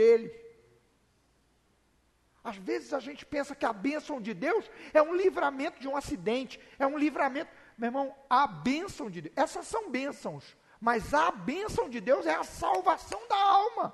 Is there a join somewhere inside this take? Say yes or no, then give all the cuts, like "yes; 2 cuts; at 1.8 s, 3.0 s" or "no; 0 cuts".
no; 0 cuts